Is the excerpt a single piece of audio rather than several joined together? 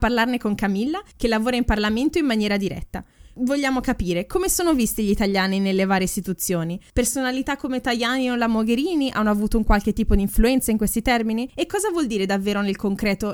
yes; 0 cuts

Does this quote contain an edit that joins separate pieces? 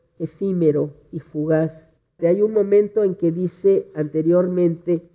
yes; 1 cut; at 2.2 s

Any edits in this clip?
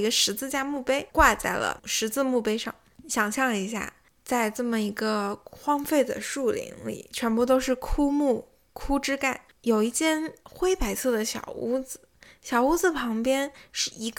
yes; 1 cut; at 1.1 s

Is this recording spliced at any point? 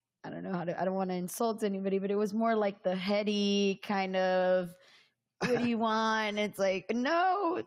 no; 0 cuts

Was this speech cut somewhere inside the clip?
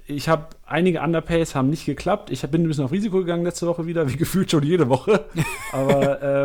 no; 0 cuts

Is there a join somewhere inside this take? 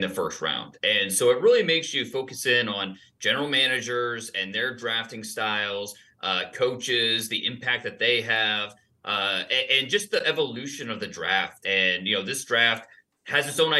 yes; 1 cut; at 11.6 s

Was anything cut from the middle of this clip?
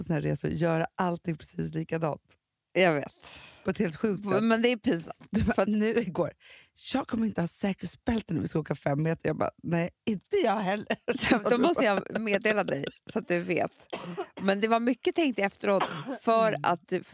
no; 0 cuts

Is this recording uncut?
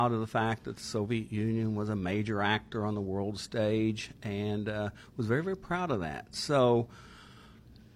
yes; 0 cuts

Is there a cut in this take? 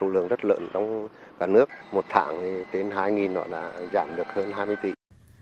yes; 1 cut; at 1.8 s

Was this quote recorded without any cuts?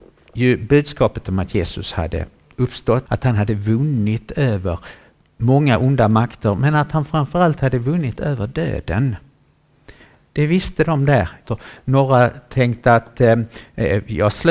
no; 2 cuts; at 3.1 s, 11.5 s

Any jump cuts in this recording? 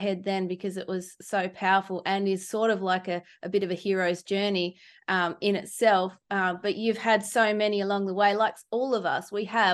no; 0 cuts

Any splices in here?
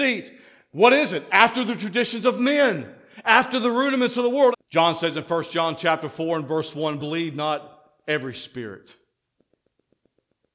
yes; 2 cuts; at 4.5 s, 7.0 s

